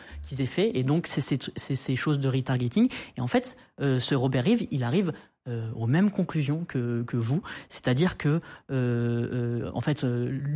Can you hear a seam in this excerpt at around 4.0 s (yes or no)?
no